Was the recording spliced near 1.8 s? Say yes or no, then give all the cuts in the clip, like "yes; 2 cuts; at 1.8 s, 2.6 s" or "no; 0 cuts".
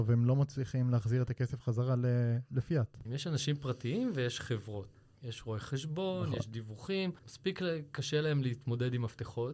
no; 3 cuts; at 3.1 s, 5.1 s, 7.2 s